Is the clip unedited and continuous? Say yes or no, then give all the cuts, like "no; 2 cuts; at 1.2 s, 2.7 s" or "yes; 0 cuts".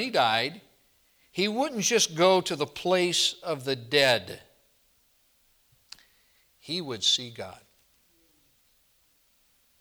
yes; 0 cuts